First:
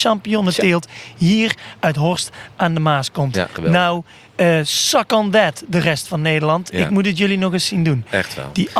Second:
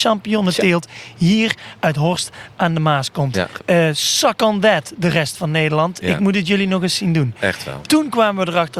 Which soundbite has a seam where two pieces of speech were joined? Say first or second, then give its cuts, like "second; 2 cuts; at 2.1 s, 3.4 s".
second; 2 cuts; at 3.6 s, 7.8 s